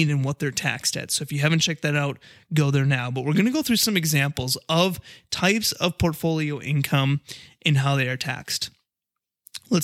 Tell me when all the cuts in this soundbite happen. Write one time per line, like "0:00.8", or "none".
none